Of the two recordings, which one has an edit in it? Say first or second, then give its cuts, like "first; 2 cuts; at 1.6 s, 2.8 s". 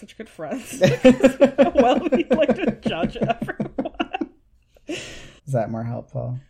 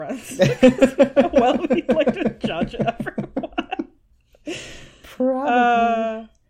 first; 1 cut; at 5.4 s